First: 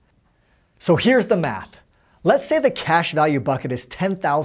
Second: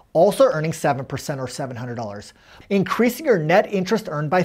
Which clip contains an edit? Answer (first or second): second